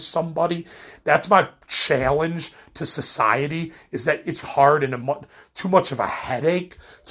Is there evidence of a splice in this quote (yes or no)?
yes